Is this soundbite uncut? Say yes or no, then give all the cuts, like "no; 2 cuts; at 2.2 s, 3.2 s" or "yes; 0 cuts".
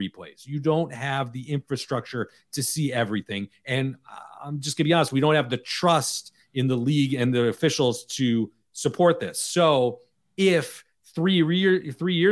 yes; 0 cuts